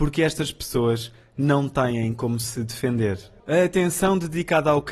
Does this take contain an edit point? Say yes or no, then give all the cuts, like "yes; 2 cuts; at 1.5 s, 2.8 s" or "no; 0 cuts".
yes; 1 cut; at 3.4 s